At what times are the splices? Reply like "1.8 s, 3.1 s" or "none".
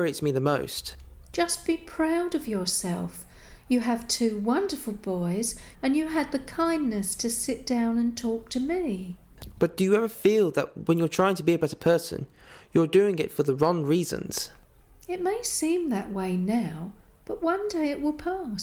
5.7 s